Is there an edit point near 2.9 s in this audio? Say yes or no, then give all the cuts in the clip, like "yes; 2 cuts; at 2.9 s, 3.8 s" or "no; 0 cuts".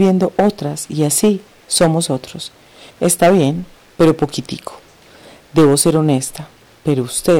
yes; 1 cut; at 2.9 s